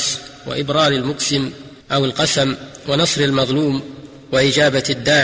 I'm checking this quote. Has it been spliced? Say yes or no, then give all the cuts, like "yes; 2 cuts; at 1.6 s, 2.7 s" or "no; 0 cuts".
yes; 1 cut; at 1.8 s